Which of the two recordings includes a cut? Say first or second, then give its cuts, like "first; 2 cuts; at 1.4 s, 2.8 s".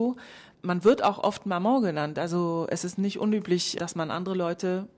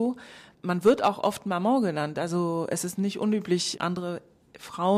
second; 1 cut; at 3.7 s